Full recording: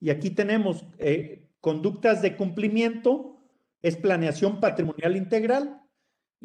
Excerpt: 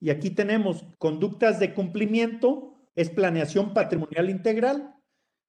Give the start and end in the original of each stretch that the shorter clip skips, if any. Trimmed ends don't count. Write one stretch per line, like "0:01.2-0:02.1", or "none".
0:00.9-0:01.5
0:03.5-0:03.7